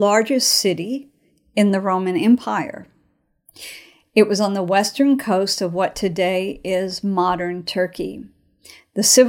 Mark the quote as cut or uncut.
uncut